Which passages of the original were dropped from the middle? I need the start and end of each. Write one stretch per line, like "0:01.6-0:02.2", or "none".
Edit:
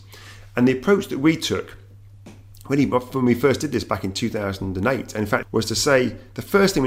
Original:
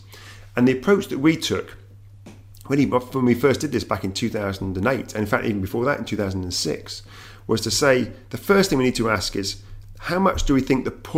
0:05.4-0:07.4